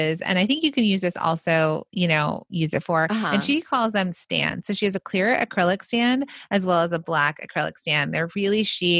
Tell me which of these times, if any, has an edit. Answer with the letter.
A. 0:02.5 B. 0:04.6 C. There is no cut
A